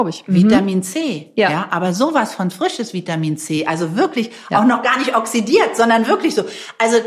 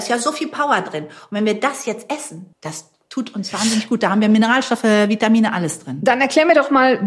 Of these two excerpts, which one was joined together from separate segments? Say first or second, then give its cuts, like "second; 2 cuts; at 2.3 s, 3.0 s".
second; 1 cut; at 2.5 s